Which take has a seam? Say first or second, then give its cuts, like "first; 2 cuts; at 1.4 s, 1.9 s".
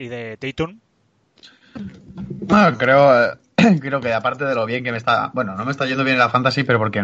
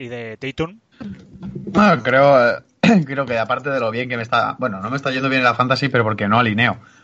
second; 1 cut; at 0.9 s